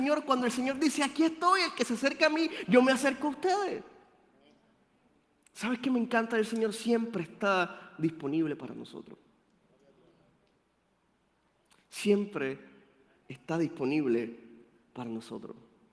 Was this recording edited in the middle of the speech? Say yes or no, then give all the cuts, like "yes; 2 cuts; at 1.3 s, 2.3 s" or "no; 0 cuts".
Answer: no; 0 cuts